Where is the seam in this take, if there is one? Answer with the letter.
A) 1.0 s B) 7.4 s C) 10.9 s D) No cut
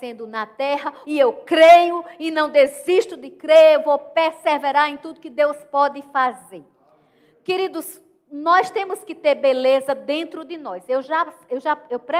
A